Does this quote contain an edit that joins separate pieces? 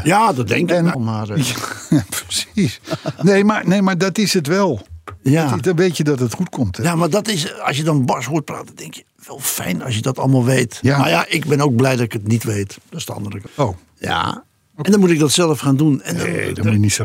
yes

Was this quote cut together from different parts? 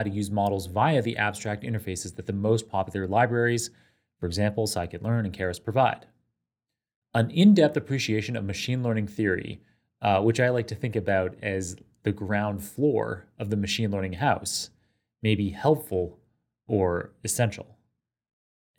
yes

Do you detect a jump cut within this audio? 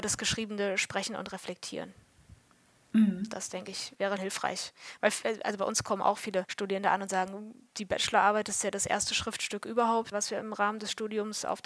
yes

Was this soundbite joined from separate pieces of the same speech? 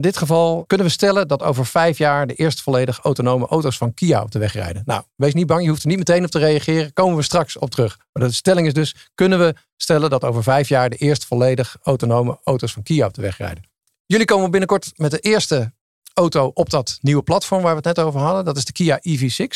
no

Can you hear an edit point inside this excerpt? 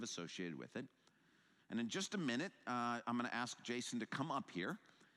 yes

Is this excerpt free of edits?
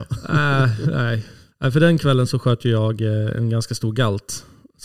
no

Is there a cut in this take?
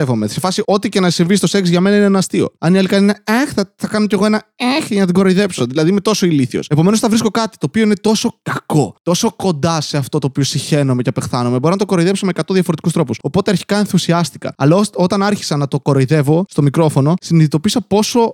no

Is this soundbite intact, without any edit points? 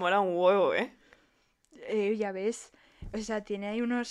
yes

